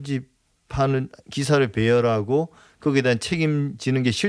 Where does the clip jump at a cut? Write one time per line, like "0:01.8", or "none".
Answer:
none